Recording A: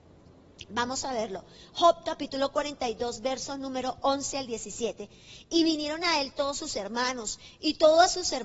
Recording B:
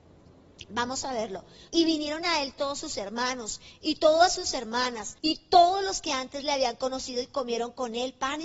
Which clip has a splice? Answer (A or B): B